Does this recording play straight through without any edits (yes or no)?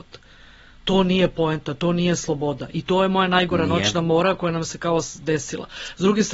yes